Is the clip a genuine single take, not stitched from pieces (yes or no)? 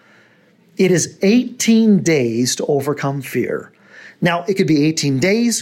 yes